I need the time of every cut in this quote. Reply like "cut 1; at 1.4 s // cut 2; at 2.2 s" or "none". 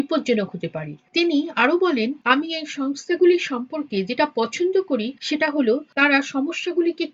none